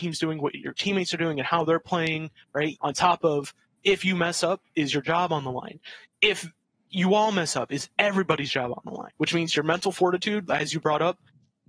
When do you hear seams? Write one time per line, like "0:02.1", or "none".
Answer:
0:02.8
0:09.1

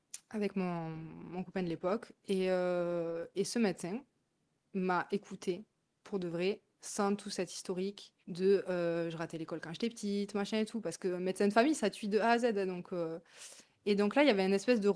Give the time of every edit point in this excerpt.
0:08.2

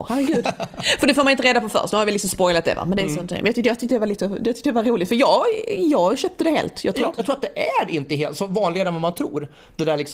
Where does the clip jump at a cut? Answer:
0:07.2

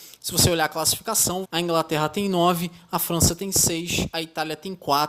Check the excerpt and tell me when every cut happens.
0:01.4

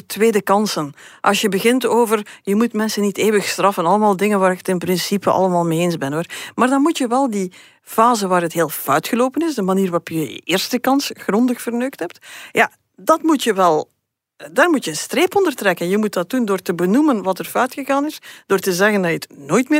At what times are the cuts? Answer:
none

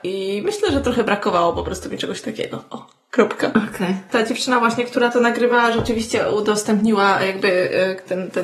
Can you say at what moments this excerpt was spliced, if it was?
0:04.1

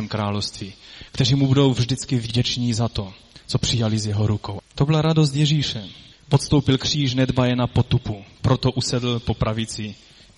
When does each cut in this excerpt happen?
none

